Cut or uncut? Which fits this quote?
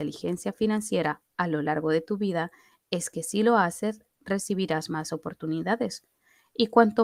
uncut